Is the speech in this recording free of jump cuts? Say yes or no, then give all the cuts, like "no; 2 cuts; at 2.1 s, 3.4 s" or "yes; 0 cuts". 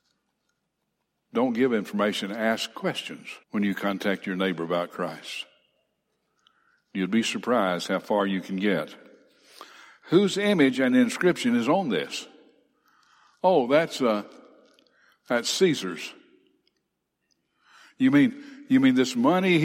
no; 1 cut; at 3.4 s